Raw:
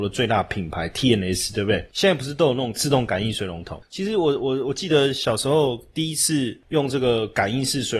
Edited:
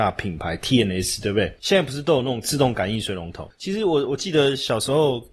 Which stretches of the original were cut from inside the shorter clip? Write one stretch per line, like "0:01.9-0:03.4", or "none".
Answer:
0:04.4-0:04.6